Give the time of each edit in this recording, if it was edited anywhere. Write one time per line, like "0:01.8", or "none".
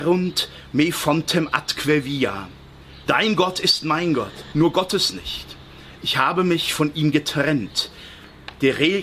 0:03.1
0:04.5
0:06.0